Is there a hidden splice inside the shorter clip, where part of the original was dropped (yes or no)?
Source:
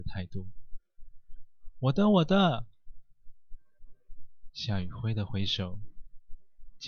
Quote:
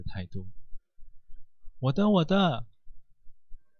no